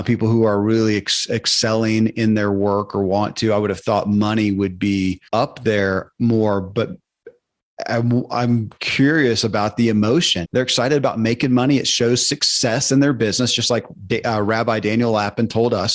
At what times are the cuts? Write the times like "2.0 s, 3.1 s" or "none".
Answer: 5.3 s, 10.4 s